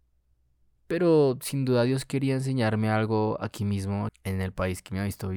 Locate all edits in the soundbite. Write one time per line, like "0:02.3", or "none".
0:04.1